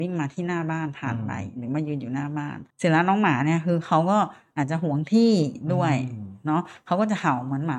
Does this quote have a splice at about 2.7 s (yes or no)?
yes